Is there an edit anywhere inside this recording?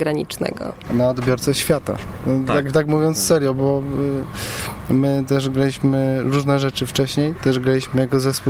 no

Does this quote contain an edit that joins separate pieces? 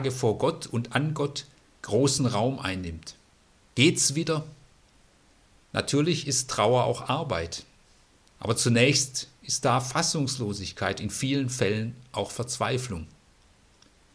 yes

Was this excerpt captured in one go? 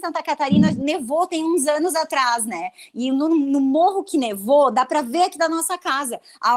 yes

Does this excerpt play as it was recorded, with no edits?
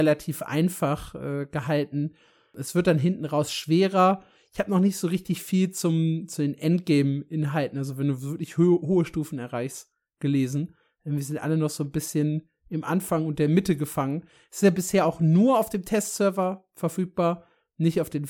yes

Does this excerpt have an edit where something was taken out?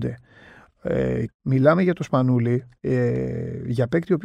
yes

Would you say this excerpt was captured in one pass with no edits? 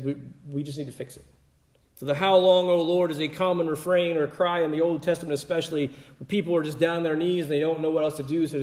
no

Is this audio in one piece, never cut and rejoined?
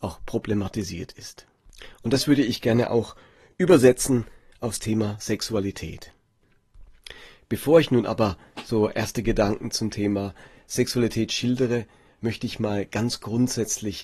yes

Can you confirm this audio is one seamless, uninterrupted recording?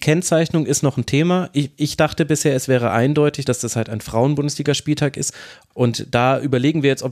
no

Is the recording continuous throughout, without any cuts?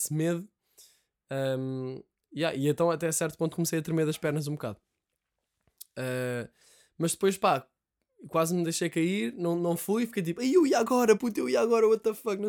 yes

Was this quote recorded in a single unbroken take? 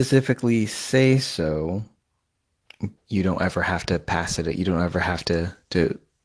no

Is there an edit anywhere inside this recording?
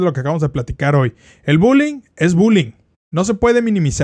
no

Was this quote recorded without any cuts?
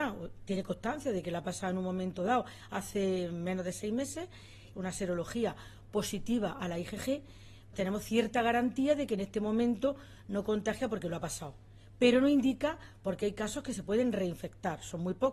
no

